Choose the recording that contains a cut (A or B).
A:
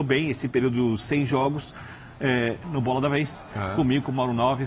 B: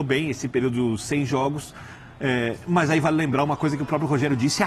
A